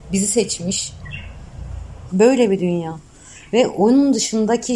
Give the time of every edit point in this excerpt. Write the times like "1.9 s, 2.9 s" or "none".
2.1 s